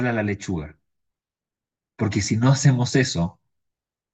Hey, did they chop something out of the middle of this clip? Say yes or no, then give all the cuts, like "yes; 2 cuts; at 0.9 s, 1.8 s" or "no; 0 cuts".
no; 0 cuts